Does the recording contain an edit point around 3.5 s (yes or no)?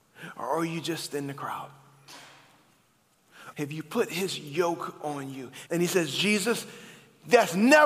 yes